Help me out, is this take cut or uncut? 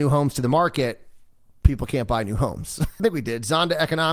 cut